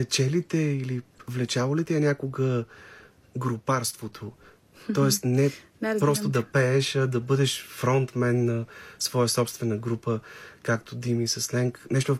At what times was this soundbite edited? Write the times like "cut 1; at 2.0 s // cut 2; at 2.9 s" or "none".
none

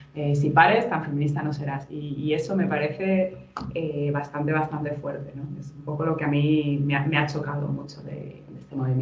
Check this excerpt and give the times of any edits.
none

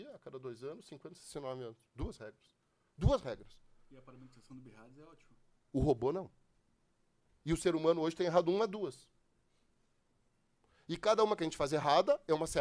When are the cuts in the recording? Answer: cut 1; at 5.5 s

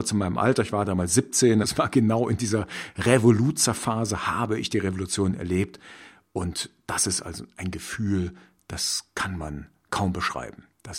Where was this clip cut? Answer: cut 1; at 1.6 s

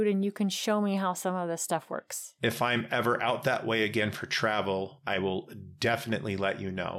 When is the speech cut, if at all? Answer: none

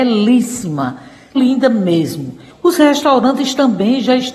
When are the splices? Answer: cut 1; at 1.4 s // cut 2; at 2.5 s

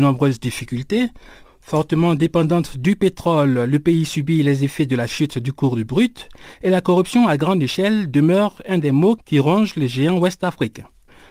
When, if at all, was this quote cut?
cut 1; at 1.4 s

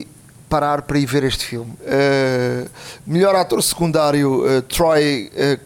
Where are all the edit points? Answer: cut 1; at 1.8 s

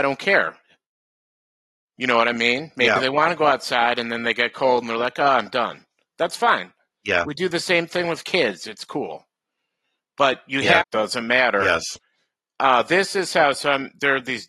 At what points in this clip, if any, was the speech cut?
cut 1; at 10.8 s

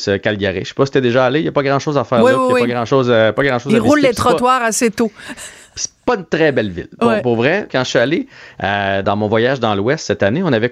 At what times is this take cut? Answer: cut 1; at 7.7 s // cut 2; at 9.0 s

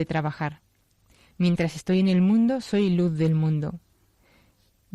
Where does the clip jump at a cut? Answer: none

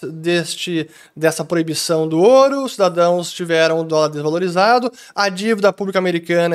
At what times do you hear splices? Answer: none

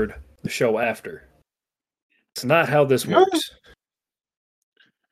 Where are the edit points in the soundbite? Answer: none

